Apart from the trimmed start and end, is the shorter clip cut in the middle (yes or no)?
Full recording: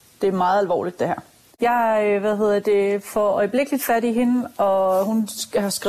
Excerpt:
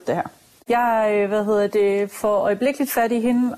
no